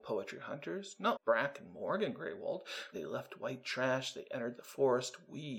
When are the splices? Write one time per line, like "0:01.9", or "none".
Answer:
0:01.2
0:02.9